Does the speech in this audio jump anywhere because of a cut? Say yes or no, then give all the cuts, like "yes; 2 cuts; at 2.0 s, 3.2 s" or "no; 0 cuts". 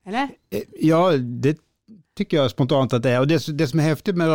no; 0 cuts